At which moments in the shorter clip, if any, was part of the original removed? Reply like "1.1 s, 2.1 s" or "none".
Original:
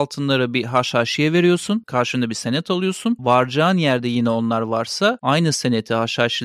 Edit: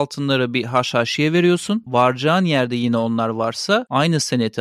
1.8 s